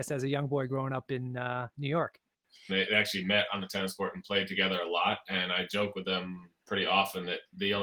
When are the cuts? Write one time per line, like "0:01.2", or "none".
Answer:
0:02.7

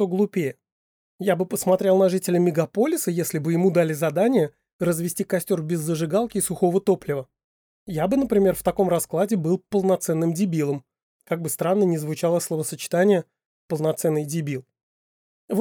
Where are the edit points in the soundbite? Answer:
none

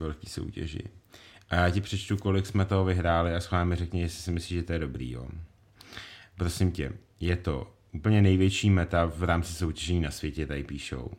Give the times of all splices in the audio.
none

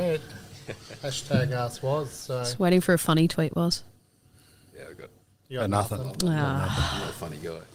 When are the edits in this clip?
none

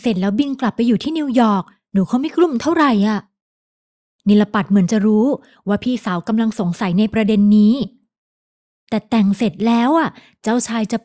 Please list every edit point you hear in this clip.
none

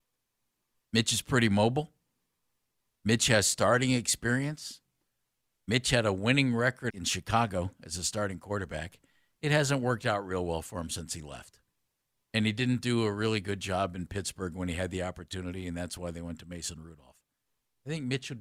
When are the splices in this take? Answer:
0:06.9

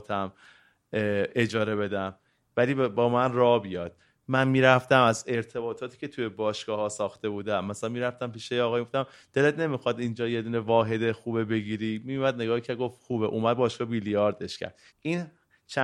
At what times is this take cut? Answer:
0:14.9

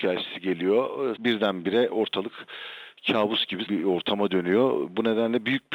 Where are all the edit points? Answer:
0:01.2
0:03.7

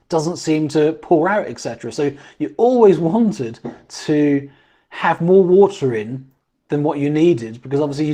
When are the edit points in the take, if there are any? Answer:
0:01.9

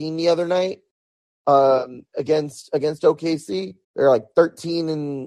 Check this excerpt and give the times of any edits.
0:03.8

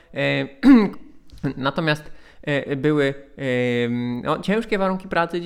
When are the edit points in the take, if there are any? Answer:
0:00.9

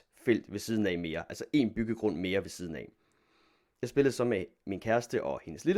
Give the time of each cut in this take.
none

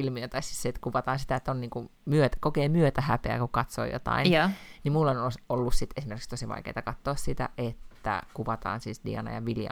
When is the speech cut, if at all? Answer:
none

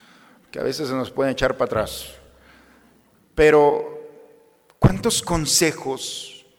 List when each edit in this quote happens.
none

